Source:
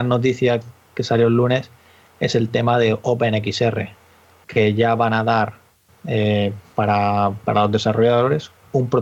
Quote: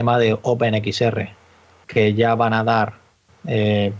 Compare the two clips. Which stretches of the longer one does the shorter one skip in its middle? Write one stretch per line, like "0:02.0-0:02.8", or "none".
none